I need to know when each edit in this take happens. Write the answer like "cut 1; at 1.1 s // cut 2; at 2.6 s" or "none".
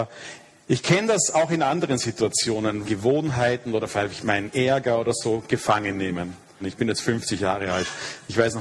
cut 1; at 2.8 s // cut 2; at 6.6 s

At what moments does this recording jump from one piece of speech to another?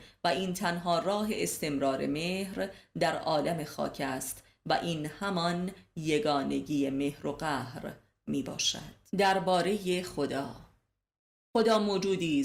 cut 1; at 9.1 s

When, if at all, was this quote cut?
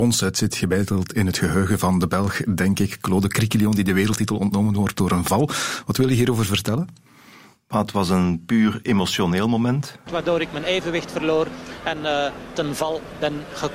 cut 1; at 10.1 s

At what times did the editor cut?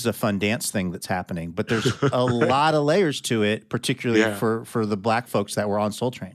none

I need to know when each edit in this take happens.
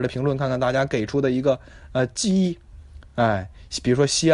none

